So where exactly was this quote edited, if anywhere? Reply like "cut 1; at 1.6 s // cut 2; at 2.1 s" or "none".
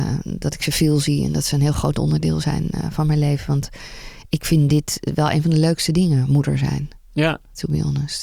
none